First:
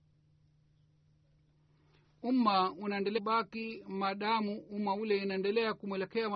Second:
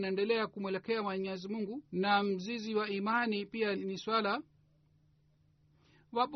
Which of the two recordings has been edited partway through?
second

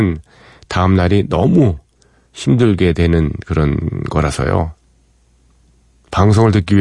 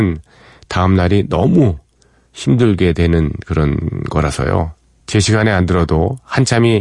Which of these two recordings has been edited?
second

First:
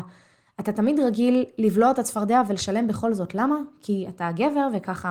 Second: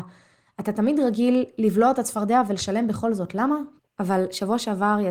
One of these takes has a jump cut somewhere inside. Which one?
second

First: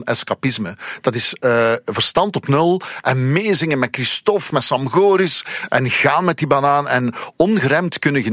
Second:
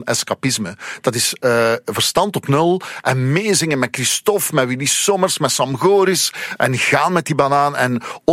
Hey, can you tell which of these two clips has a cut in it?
first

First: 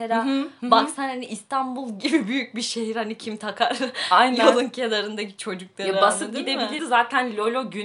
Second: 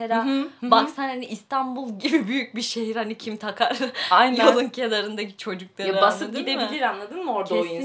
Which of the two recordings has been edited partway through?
first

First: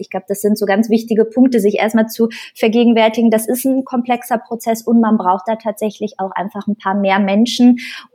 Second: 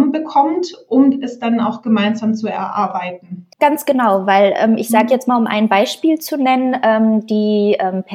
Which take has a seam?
second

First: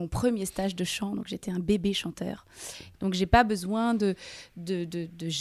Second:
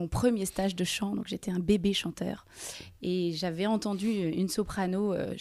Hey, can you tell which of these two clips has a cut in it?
first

